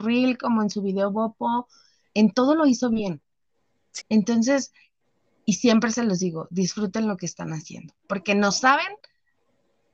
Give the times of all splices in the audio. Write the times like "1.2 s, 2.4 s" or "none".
4.0 s